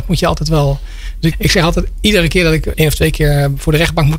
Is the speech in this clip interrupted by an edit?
yes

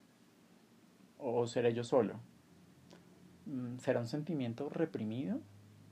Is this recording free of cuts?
no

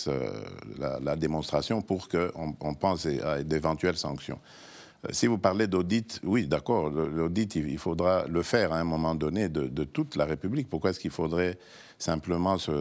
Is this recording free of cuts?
yes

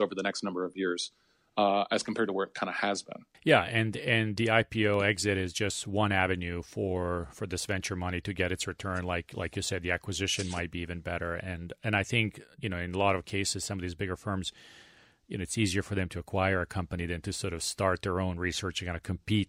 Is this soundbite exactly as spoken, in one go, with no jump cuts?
yes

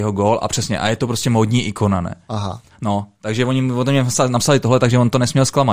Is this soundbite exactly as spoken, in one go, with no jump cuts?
yes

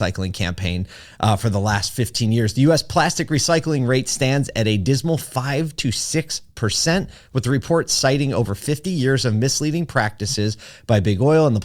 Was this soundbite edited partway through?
no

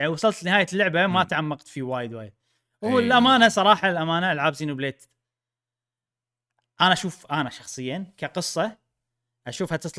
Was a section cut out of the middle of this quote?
no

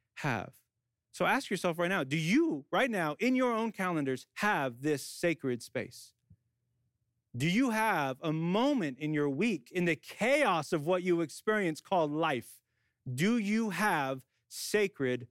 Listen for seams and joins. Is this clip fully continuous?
yes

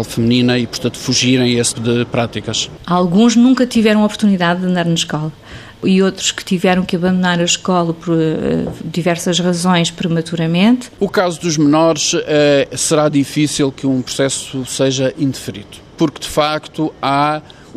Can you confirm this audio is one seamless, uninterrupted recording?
no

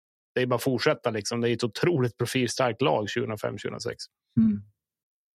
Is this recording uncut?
yes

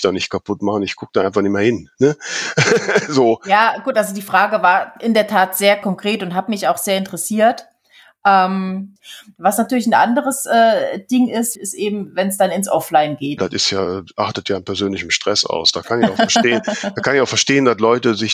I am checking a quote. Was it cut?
yes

